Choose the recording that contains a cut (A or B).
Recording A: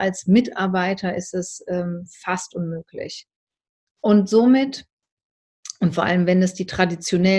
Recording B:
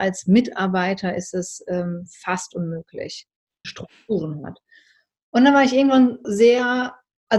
B